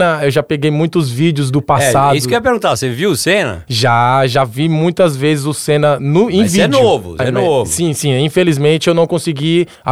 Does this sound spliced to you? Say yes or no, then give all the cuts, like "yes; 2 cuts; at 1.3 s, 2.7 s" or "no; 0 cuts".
yes; 1 cut; at 7.2 s